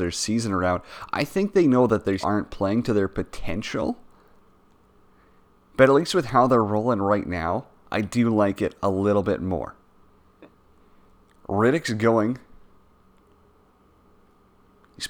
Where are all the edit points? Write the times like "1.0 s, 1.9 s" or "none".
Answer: 2.2 s